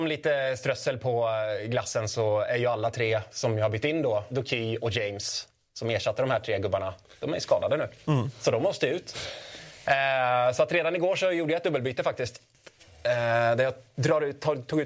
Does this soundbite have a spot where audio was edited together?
yes; 1 cut; at 4.3 s

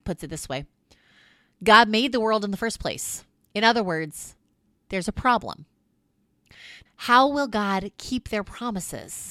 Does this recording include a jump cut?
yes; 2 cuts; at 3.4 s, 6.9 s

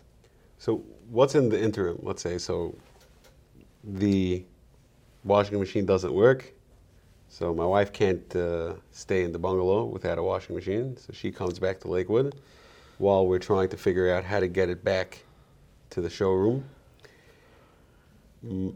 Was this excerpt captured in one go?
yes; 0 cuts

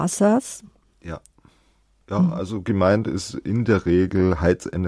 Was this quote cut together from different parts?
no; 0 cuts

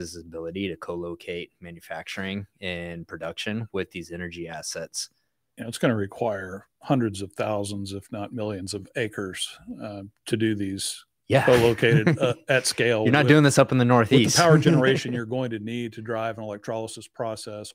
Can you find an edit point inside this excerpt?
no; 0 cuts

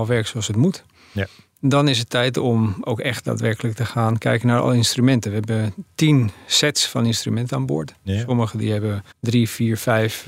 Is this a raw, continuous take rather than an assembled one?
no; 1 cut; at 9.1 s

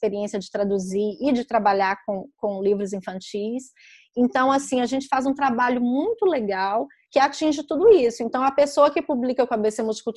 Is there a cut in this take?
no; 0 cuts

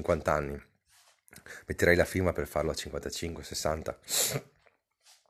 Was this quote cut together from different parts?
no; 0 cuts

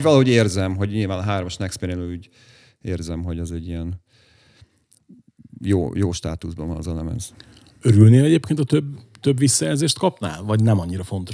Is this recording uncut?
yes; 0 cuts

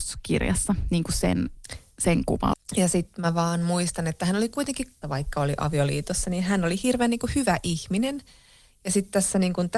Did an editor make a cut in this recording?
yes; 2 cuts; at 2.5 s, 5.0 s

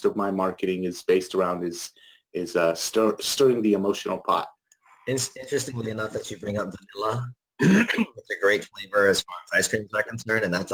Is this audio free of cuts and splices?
yes; 0 cuts

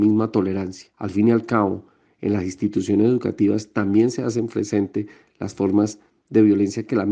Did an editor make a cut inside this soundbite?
yes; 1 cut; at 0.9 s

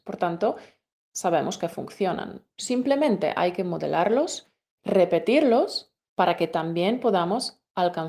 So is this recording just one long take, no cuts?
no; 1 cut; at 4.8 s

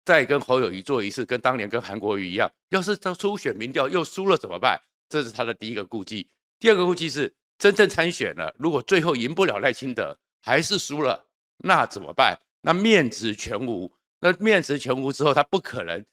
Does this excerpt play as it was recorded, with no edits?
yes; 0 cuts

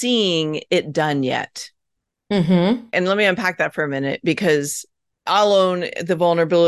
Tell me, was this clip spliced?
yes; 1 cut; at 2.9 s

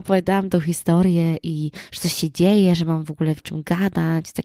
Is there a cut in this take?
yes; 1 cut; at 3.4 s

